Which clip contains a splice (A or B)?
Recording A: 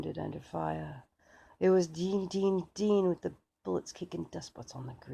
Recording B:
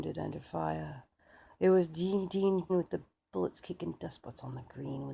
B